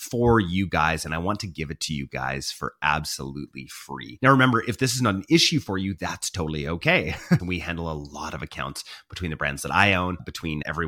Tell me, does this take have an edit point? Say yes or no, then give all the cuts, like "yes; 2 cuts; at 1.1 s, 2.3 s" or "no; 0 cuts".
yes; 2 cuts; at 4.2 s, 7.4 s